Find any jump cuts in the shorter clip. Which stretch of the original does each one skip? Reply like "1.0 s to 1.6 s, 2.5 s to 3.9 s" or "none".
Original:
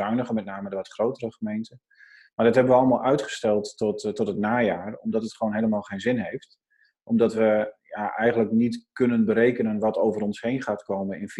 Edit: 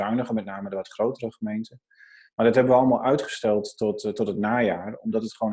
none

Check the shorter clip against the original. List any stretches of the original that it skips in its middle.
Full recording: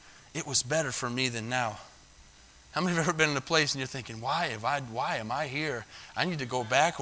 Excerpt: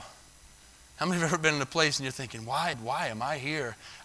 4.5 s to 4.8 s

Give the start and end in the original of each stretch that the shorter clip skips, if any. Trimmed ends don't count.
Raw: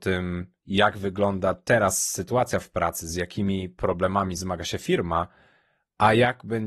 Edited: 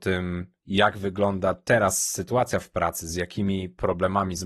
none

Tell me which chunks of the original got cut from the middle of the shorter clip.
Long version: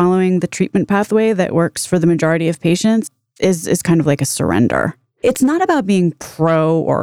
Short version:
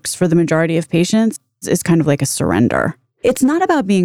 3.3 s to 3.6 s

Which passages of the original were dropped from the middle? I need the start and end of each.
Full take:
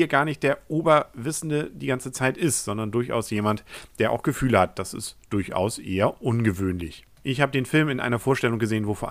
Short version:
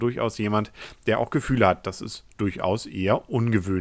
none

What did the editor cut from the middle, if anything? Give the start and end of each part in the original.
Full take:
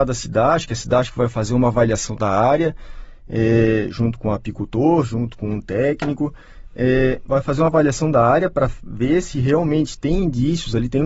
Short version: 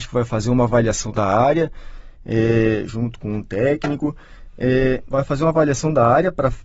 3.9 s to 5.1 s

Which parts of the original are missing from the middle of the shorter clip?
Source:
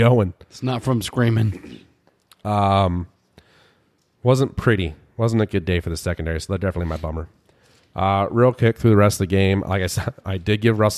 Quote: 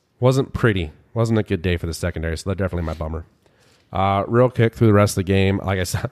none

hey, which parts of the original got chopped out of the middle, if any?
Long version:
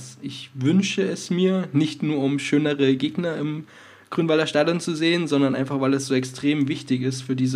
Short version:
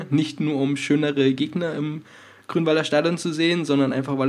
none

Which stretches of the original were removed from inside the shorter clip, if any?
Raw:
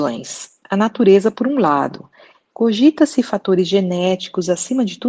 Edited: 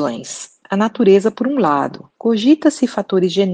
2.1 s to 2.5 s

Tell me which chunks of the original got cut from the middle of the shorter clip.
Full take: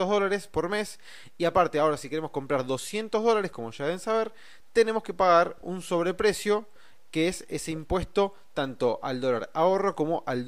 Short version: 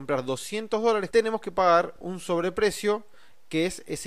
3.5 s to 4.7 s

